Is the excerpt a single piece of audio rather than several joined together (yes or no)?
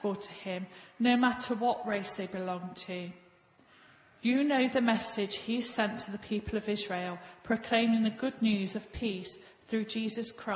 yes